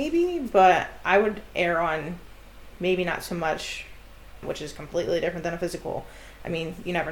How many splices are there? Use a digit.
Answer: 1